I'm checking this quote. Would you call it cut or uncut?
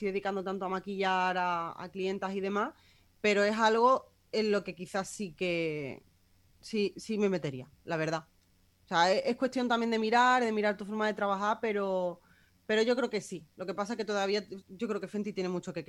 uncut